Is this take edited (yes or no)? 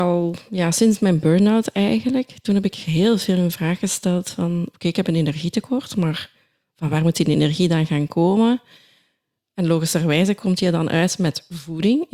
no